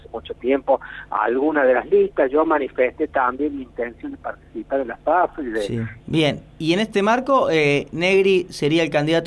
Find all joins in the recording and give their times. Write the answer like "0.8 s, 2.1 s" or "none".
6.0 s